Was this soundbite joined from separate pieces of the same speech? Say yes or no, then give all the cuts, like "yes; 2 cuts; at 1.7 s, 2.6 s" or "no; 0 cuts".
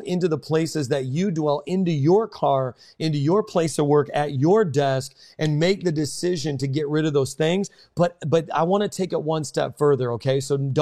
no; 0 cuts